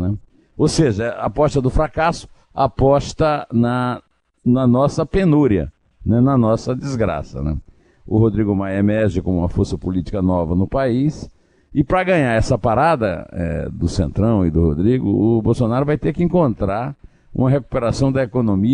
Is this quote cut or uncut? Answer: cut